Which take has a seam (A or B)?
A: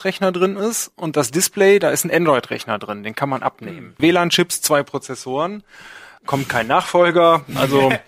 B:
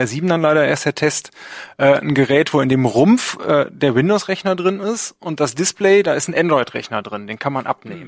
A